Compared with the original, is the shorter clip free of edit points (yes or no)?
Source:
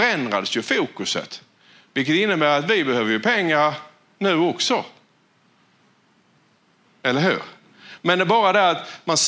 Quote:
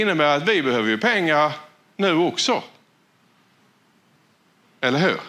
yes